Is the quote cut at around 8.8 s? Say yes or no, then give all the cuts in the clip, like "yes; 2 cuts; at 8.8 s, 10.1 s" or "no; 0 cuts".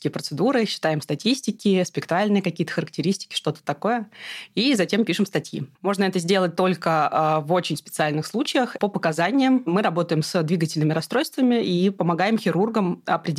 yes; 2 cuts; at 5.8 s, 8.8 s